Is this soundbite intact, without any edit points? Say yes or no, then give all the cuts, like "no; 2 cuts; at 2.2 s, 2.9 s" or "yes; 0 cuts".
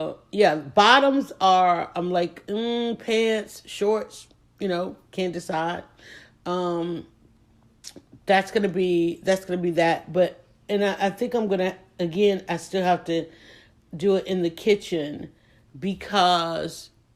yes; 0 cuts